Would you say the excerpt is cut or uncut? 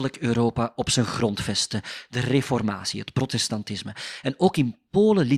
uncut